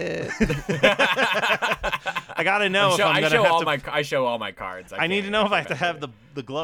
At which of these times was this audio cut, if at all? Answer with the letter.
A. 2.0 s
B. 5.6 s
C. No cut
B